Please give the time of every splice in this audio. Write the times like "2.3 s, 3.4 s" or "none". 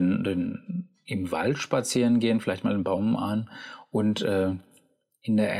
none